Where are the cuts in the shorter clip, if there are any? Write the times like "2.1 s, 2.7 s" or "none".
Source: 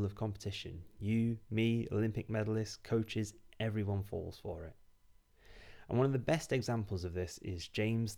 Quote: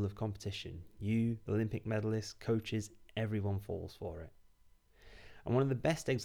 1.5 s